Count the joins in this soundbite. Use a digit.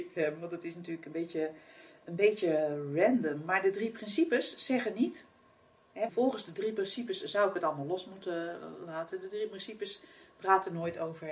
1